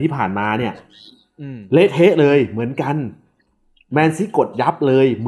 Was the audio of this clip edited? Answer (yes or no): no